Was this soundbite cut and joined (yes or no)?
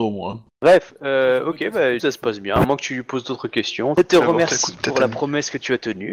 yes